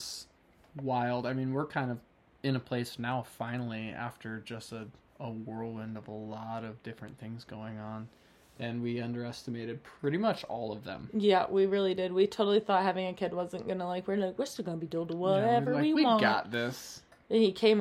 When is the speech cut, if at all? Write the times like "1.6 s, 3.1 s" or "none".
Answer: none